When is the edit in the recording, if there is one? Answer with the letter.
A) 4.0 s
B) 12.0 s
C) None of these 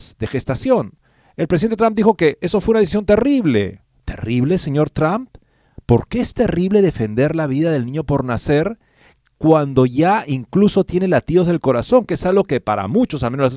C